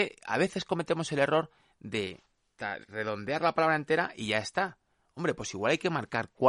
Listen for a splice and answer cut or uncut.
uncut